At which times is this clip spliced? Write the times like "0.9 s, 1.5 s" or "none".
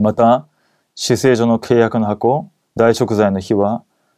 2.6 s